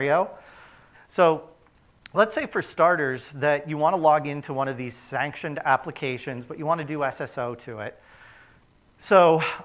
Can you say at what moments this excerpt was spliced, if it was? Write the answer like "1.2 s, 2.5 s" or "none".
0.9 s